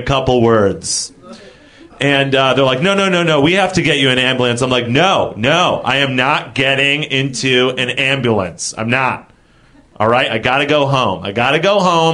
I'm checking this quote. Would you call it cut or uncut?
uncut